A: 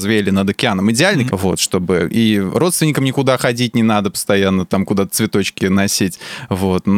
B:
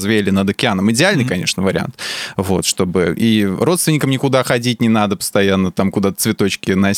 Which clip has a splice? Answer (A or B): A